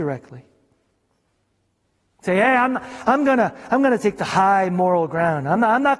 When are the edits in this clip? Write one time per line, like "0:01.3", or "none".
none